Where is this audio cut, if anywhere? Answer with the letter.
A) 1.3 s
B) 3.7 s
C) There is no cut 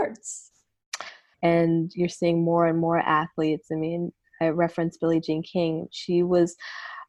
A